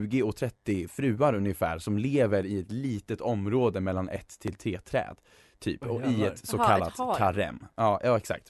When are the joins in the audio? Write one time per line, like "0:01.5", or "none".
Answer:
none